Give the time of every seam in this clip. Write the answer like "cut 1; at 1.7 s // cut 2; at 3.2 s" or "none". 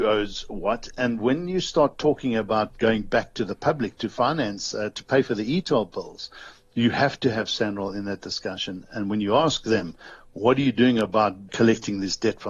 none